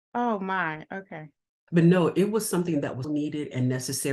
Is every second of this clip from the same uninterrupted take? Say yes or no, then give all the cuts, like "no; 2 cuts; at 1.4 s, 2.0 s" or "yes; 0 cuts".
no; 2 cuts; at 1.7 s, 3.0 s